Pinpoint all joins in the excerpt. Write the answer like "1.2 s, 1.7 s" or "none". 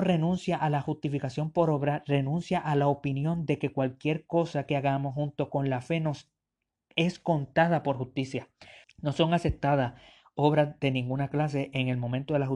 8.8 s